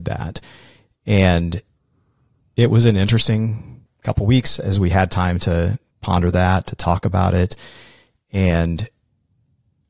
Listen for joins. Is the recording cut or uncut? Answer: uncut